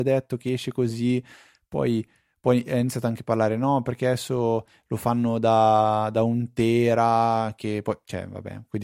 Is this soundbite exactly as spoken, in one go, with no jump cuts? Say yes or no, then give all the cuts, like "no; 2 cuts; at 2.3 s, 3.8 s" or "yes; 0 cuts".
yes; 0 cuts